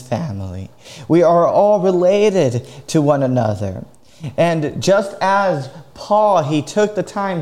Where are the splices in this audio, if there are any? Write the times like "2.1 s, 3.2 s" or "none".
none

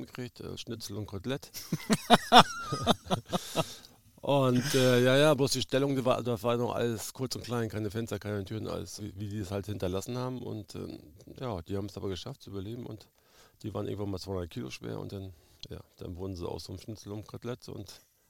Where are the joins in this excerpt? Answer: 9.0 s, 11.4 s

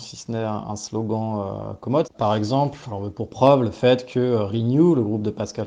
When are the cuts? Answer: 2.0 s

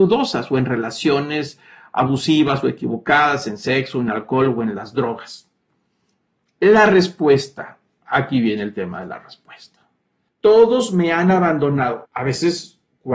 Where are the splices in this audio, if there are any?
10.3 s, 12.1 s

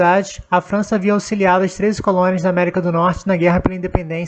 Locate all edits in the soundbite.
none

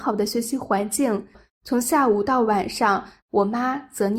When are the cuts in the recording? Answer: 1.3 s, 3.2 s

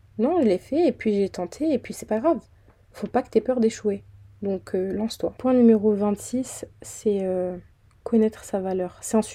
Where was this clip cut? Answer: none

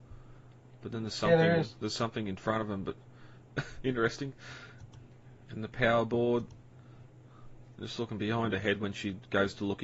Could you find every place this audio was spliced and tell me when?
3.5 s

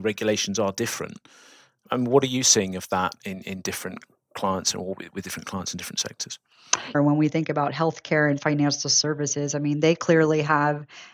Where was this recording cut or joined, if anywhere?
6.9 s

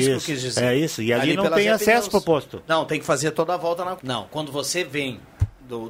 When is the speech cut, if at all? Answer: 4.0 s

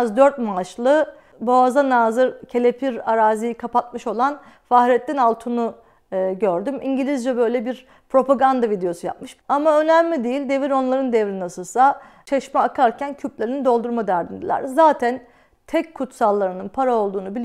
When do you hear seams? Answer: 9.4 s

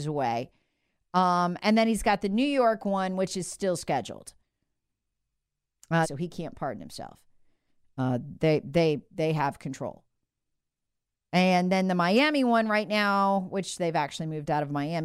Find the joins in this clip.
6.0 s

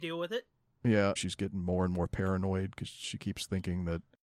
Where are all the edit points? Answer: 1.2 s

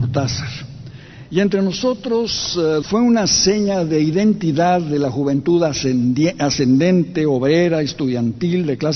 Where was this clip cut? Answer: 1.2 s, 2.8 s

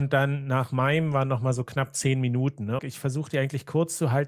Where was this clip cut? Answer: 2.8 s

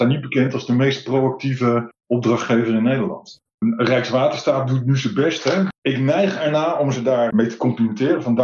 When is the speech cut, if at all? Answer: 5.7 s

